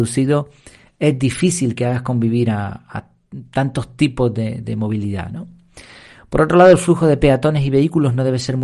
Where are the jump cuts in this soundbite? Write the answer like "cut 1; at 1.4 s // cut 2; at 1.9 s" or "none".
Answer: none